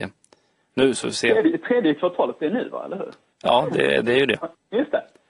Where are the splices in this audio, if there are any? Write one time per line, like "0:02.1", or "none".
none

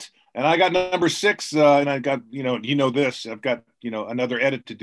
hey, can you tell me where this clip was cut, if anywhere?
0:01.8

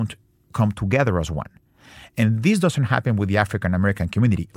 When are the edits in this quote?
none

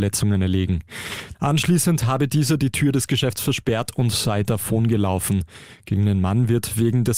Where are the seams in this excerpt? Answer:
0:01.3

